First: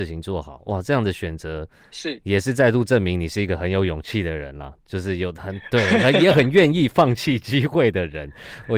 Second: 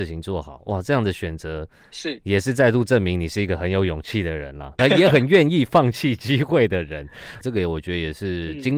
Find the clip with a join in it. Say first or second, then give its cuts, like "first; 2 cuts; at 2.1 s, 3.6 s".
second; 2 cuts; at 4.8 s, 7.4 s